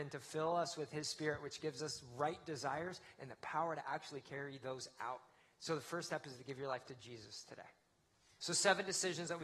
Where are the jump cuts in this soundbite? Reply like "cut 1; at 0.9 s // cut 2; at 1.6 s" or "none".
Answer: cut 1; at 8.4 s